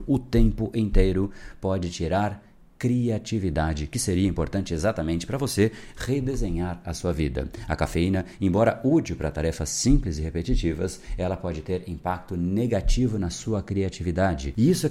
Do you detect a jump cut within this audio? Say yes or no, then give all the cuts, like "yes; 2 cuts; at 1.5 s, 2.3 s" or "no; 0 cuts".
no; 0 cuts